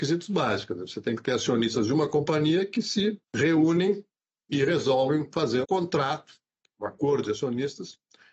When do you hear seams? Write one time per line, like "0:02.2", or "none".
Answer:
0:03.2
0:05.6